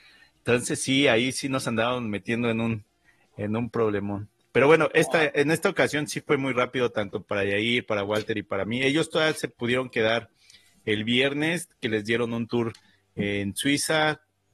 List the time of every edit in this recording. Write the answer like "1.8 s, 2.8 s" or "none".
none